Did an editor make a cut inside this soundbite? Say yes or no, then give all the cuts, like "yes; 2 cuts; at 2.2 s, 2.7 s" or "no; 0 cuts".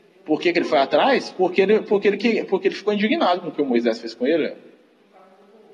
no; 0 cuts